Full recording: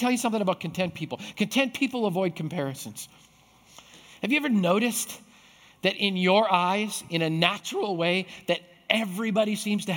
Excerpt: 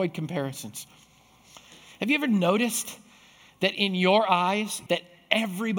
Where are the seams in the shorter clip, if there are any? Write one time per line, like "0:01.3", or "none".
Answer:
0:04.9